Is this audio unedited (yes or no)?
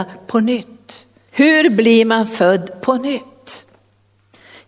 no